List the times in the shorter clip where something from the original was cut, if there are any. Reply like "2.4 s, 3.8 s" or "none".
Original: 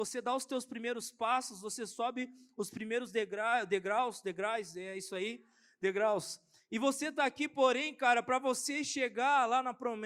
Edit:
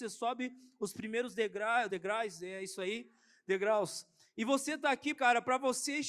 1.9 s, 5.2 s